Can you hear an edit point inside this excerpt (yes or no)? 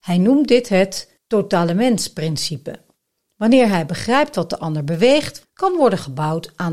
yes